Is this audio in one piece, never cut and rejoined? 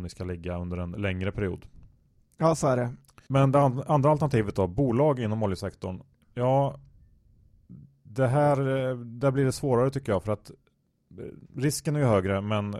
yes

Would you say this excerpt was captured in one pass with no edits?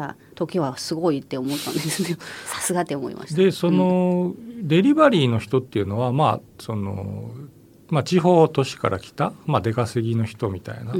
yes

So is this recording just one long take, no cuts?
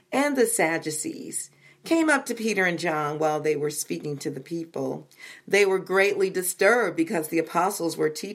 yes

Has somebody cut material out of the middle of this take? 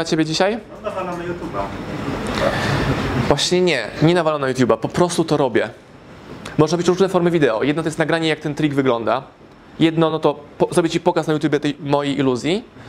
no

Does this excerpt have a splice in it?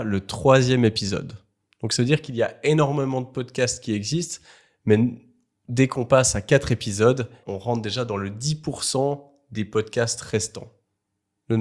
yes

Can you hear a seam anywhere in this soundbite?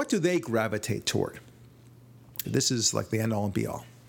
yes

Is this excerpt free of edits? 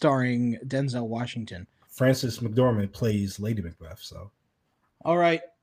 yes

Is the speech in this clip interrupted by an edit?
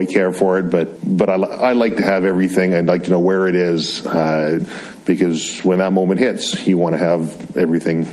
yes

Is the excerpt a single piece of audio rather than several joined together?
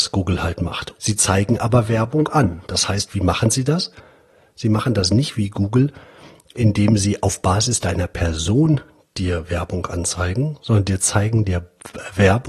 no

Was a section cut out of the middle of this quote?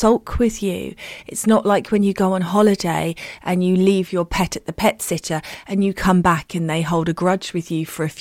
no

